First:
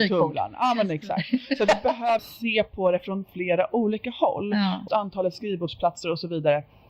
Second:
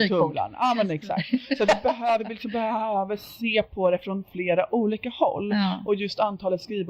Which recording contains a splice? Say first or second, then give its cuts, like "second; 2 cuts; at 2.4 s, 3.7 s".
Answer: first; 2 cuts; at 2.2 s, 4.9 s